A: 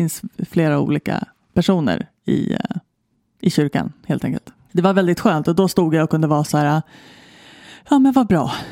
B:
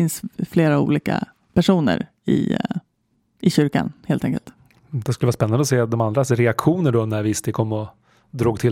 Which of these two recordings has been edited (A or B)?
A